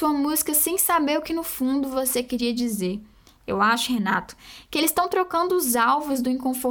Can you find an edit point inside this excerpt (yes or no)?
no